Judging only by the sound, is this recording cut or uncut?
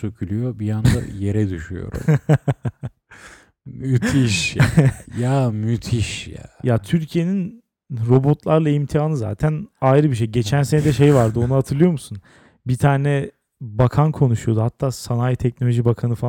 uncut